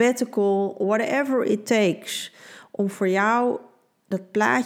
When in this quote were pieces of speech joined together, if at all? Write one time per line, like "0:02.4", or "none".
none